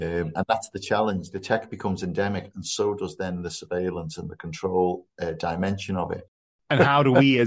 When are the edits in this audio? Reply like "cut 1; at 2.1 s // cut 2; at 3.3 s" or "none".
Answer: none